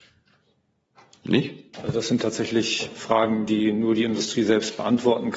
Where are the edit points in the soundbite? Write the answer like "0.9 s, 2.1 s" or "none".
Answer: 1.7 s